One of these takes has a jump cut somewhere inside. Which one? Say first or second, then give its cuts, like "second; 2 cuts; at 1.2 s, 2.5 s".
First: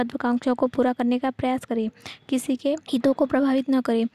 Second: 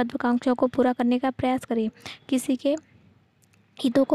first; 1 cut; at 2.8 s